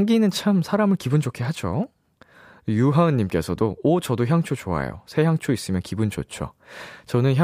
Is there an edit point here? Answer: no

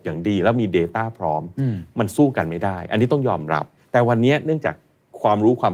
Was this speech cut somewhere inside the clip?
no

